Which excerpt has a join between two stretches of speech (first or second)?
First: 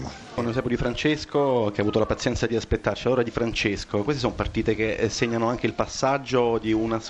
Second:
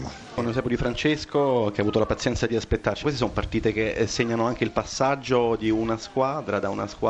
second